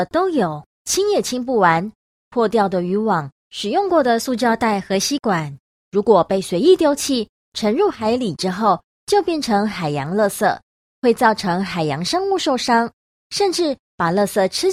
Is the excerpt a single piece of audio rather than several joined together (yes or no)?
yes